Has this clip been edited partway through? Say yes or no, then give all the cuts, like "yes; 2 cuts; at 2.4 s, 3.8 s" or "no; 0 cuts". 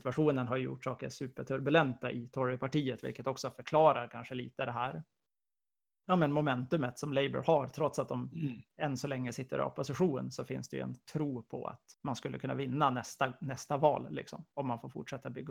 yes; 1 cut; at 12.0 s